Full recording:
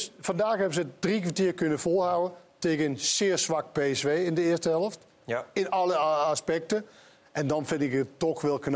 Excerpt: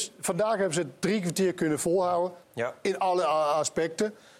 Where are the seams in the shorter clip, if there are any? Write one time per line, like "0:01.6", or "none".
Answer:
0:02.4